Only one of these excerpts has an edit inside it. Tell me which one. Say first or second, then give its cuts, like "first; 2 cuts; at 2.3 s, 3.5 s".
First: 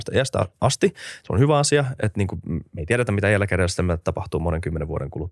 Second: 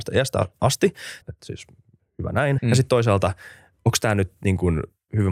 second; 2 cuts; at 1.2 s, 2.6 s